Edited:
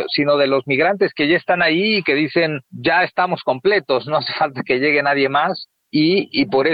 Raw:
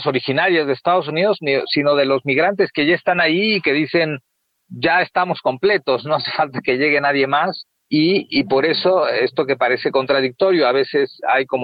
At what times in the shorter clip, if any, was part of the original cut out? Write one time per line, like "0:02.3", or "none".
0:02.6